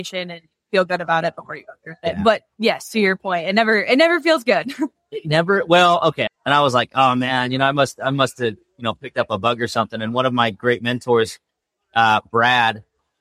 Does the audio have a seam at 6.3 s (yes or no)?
yes